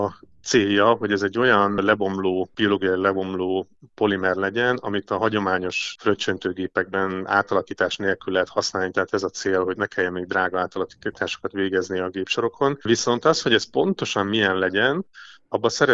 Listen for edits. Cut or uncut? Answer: cut